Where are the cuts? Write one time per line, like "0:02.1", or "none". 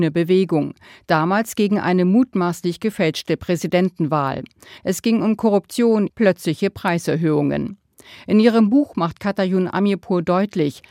0:04.8
0:06.1